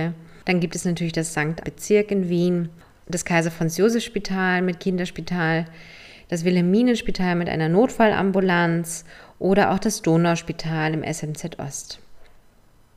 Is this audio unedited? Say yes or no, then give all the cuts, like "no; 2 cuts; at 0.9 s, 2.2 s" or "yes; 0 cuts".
no; 1 cut; at 1.6 s